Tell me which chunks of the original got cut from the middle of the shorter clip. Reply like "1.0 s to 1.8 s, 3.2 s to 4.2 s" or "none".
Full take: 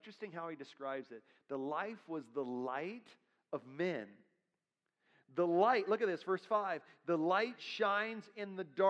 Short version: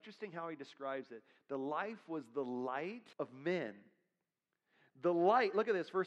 3.1 s to 3.5 s